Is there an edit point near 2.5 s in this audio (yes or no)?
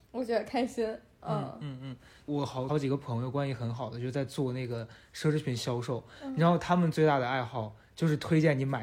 no